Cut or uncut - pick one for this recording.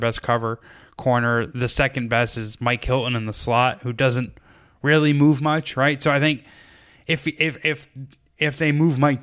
uncut